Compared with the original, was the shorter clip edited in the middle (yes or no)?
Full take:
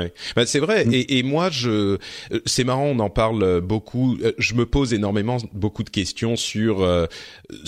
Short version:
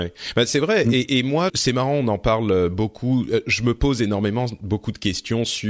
yes